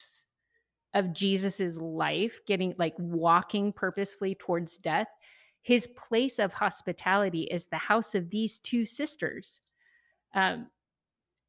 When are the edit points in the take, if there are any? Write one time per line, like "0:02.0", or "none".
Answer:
none